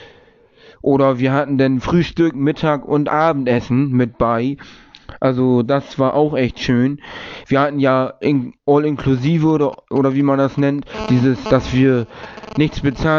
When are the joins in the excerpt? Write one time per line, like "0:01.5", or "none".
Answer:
0:07.4
0:11.5